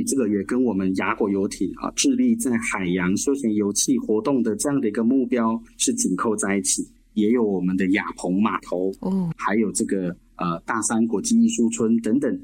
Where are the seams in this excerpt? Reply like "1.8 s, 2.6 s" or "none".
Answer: 7.0 s, 9.3 s